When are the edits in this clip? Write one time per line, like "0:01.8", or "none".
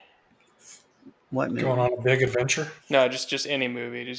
0:02.8